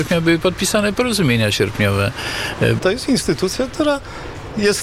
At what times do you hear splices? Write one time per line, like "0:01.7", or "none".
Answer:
0:02.8